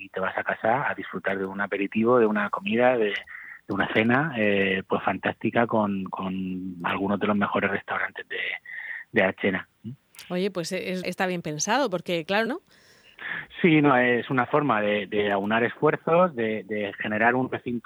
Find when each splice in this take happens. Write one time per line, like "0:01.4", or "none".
0:11.0
0:12.5

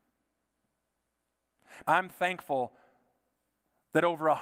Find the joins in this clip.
0:01.8

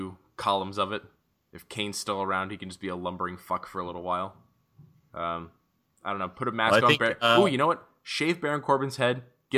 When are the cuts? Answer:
none

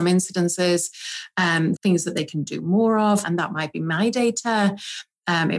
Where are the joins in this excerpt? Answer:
0:01.7
0:03.2

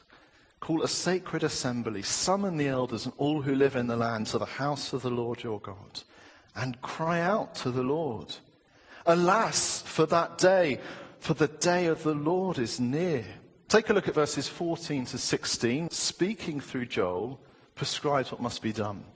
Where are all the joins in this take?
0:13.7
0:15.9

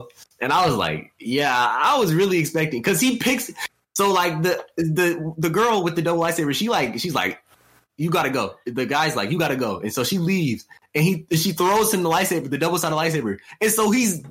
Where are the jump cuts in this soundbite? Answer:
none

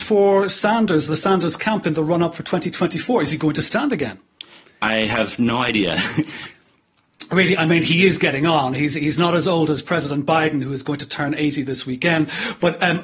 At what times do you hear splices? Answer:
none

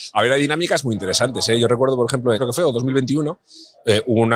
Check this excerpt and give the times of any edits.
0:02.4

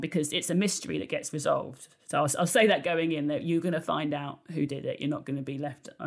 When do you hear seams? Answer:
none

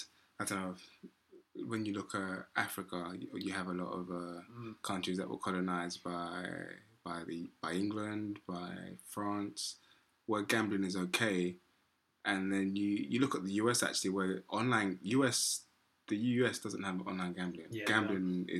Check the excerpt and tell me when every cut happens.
none

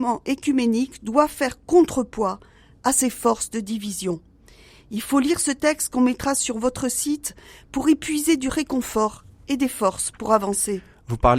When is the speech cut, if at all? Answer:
none

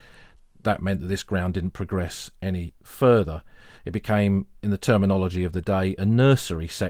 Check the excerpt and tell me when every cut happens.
0:03.8

